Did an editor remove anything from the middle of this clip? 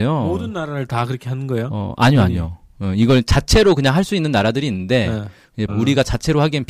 yes; 1 cut; at 5.7 s

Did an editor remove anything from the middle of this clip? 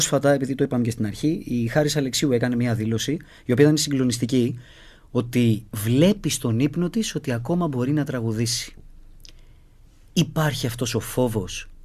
no; 0 cuts

